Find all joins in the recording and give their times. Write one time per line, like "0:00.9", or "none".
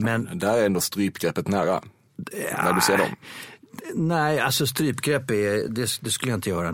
0:05.7